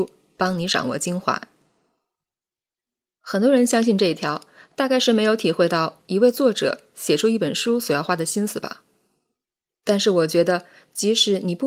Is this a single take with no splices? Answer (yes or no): no